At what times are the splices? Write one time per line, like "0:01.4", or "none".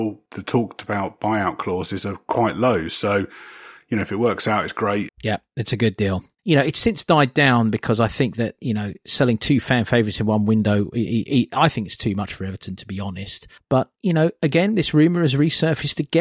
0:05.1
0:06.4